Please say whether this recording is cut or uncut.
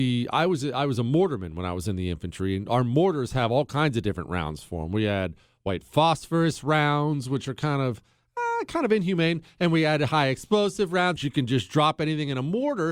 cut